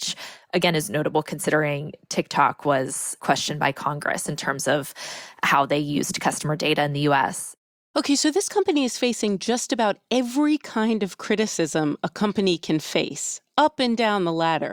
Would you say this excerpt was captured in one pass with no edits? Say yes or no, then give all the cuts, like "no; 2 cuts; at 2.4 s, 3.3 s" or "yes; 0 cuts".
yes; 0 cuts